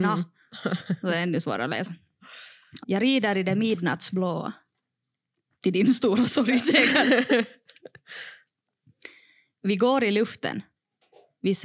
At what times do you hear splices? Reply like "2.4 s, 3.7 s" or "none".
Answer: 2.8 s, 5.5 s